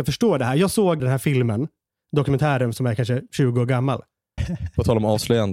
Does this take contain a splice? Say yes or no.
yes